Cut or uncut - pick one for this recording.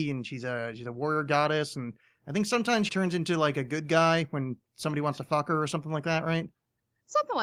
cut